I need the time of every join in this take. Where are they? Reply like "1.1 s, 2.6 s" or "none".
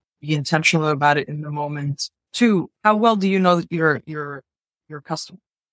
none